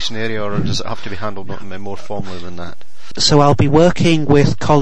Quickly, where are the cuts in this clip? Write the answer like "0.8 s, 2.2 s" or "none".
3.1 s